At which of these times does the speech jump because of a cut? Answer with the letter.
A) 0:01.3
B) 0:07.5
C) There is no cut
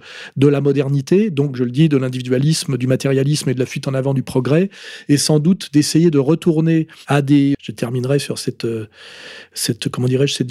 B